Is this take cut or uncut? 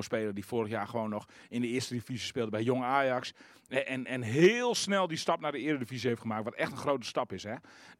uncut